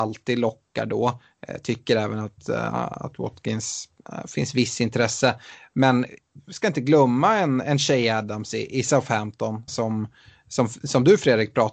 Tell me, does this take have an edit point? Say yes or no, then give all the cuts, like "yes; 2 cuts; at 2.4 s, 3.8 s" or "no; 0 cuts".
yes; 1 cut; at 9.7 s